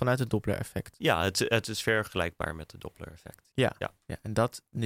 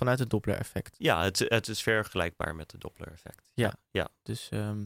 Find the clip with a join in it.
first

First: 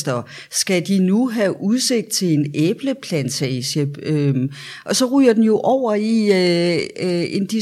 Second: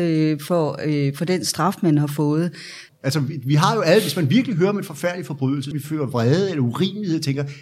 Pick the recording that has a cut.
second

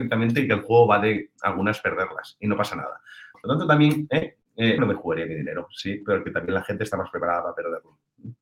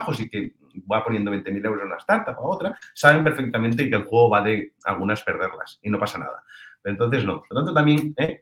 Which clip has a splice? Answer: first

